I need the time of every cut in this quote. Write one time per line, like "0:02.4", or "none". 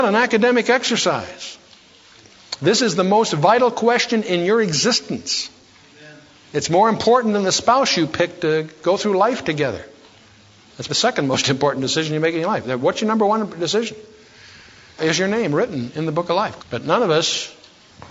0:10.9
0:16.6